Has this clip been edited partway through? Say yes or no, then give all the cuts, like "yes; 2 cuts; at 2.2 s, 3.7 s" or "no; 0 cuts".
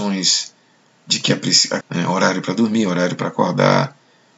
yes; 1 cut; at 1.8 s